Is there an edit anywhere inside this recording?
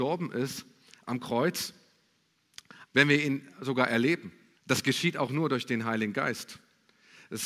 yes; 2 cuts; at 2.9 s, 4.5 s

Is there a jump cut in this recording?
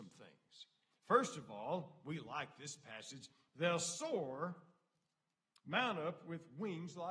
yes; 1 cut; at 0.9 s

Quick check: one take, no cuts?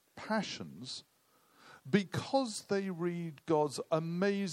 yes; 0 cuts

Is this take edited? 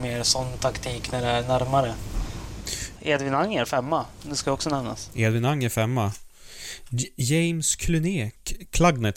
yes; 1 cut; at 3.0 s

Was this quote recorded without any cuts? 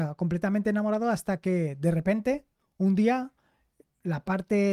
yes; 0 cuts

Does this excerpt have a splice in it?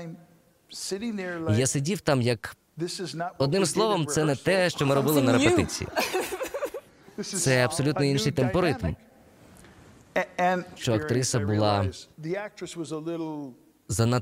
yes; 2 cuts; at 10.8 s, 12.1 s

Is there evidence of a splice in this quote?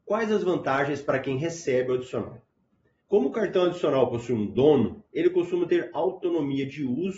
yes; 2 cuts; at 3.0 s, 5.1 s

